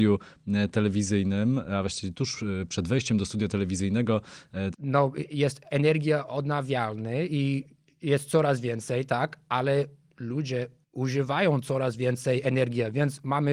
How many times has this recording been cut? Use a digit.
1